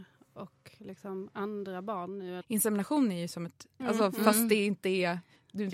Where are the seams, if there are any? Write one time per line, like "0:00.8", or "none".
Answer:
0:02.4
0:03.8